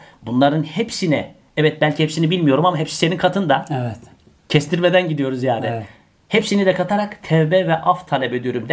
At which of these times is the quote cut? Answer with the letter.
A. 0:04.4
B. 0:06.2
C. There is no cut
C